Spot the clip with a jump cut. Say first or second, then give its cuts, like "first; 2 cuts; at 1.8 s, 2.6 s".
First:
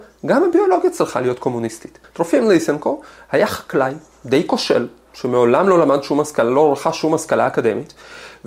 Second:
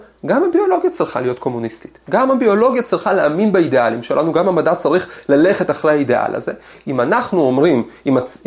first; 1 cut; at 2.0 s